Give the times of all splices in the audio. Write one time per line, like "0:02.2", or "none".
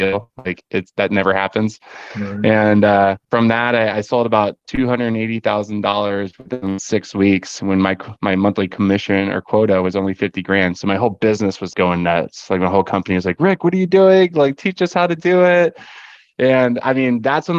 0:11.7